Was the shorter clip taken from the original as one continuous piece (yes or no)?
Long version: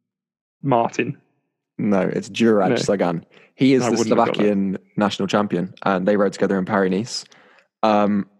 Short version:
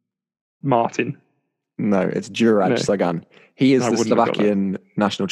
yes